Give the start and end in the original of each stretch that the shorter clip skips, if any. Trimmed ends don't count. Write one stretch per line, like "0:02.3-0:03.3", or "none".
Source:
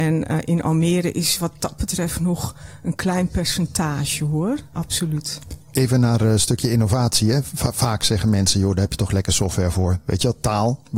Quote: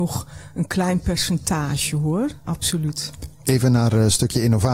none